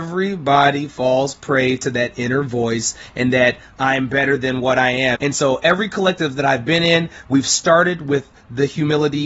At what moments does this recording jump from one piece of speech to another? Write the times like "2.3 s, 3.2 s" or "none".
5.2 s